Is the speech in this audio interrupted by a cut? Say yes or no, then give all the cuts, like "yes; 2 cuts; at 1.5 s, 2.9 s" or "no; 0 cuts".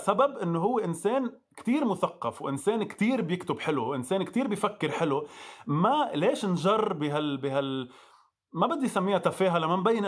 no; 0 cuts